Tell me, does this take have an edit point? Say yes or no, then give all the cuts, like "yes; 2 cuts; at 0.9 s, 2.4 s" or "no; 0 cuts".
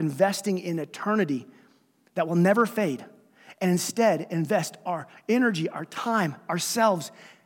no; 0 cuts